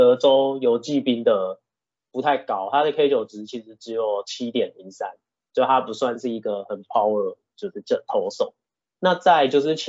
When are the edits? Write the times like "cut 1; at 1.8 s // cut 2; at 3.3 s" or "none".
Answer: cut 1; at 2.0 s